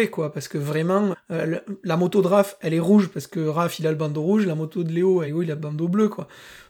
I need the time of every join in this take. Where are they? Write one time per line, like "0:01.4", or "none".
0:01.1
0:05.3